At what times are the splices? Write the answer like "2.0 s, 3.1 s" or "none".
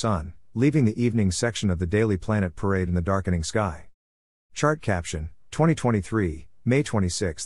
4.3 s